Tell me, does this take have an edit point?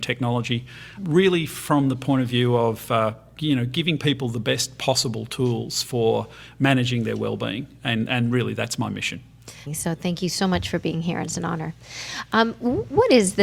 yes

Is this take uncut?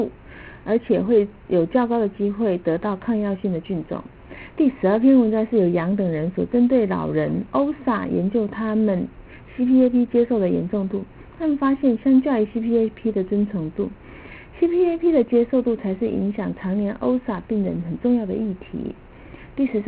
no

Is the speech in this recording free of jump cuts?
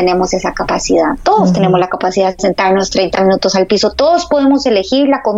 yes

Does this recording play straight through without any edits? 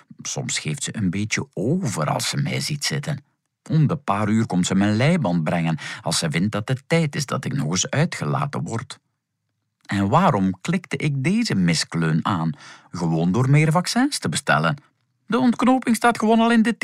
no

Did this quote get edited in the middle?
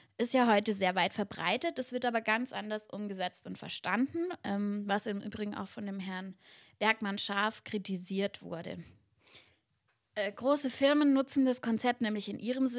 no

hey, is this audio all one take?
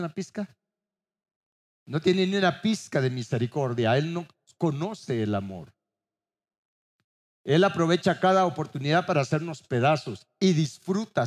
yes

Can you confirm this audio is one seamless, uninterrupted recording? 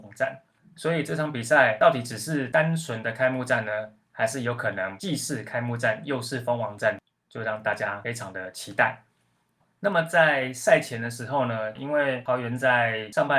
no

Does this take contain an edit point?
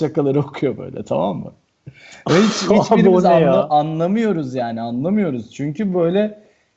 no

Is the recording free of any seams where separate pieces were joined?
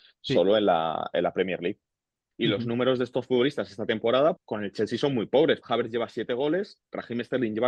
no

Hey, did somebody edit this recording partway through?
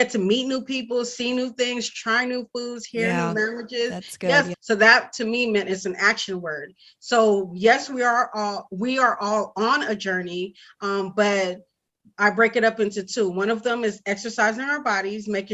yes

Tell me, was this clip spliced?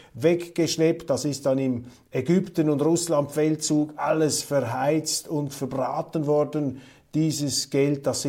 no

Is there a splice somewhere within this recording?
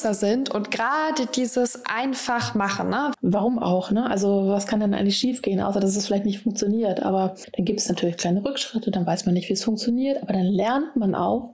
yes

